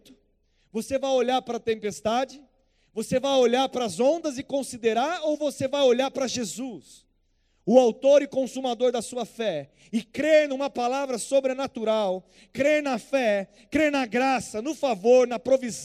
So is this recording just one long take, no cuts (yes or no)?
yes